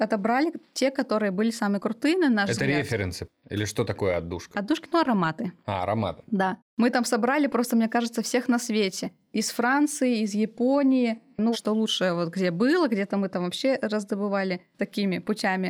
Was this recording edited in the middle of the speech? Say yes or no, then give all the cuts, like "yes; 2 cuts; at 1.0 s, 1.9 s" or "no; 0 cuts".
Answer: yes; 2 cuts; at 4.5 s, 11.5 s